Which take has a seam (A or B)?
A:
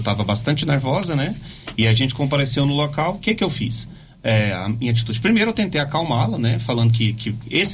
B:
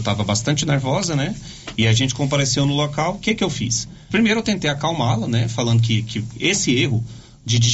B